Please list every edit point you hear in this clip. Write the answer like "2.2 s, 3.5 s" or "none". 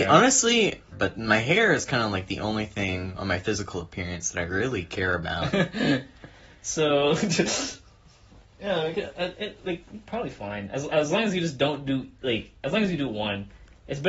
0.9 s